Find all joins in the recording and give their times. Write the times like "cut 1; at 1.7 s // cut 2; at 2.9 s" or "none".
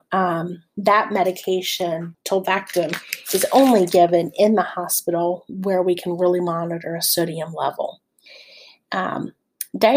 cut 1; at 2.1 s